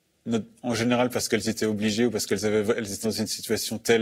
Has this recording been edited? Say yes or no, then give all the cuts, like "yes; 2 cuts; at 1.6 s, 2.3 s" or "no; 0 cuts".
yes; 1 cut; at 3.0 s